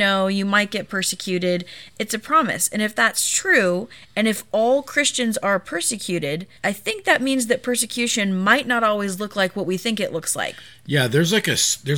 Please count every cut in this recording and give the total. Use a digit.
1